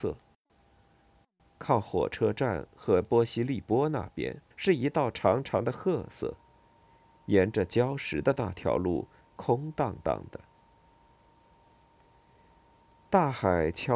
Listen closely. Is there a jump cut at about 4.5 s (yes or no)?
yes